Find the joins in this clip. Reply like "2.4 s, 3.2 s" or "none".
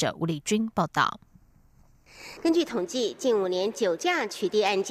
none

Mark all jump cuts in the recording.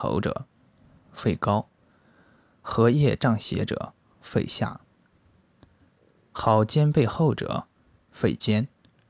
none

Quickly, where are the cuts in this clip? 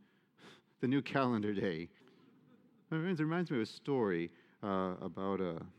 2.0 s

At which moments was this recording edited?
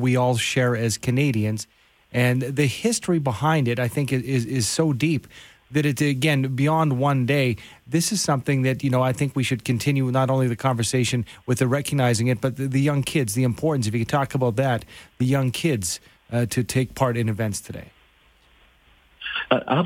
none

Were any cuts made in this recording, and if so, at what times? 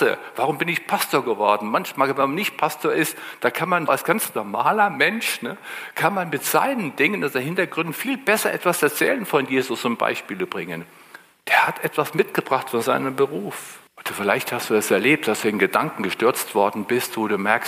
3.9 s, 13.9 s

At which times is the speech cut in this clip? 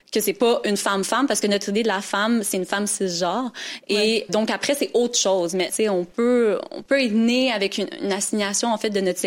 4.3 s, 5.7 s

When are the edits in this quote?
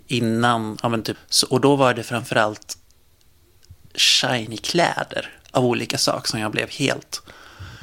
1.1 s

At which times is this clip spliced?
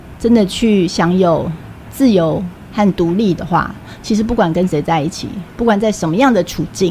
none

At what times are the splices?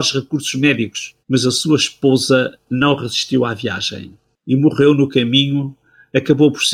1.2 s

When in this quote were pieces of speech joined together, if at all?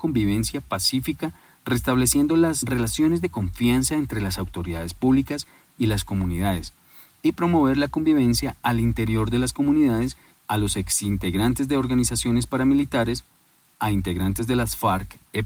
10.3 s

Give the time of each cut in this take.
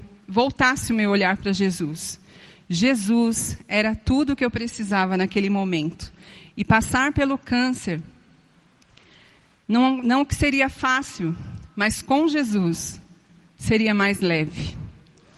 none

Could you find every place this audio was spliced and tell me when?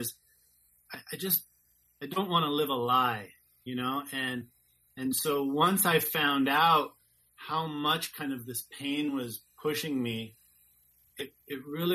none

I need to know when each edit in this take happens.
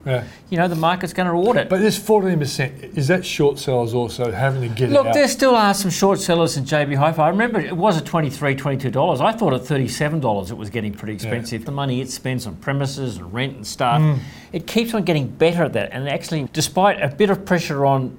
11.7 s, 16.5 s

